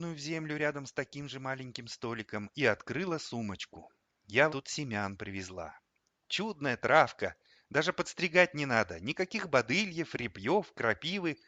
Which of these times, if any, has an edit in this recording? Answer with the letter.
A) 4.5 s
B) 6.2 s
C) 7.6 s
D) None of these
A